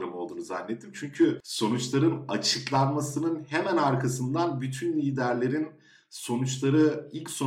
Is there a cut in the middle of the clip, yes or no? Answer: no